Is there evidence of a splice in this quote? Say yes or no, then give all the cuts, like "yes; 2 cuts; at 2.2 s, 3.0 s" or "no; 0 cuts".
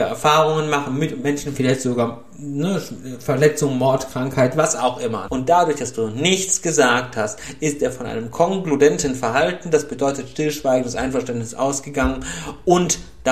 yes; 1 cut; at 5.3 s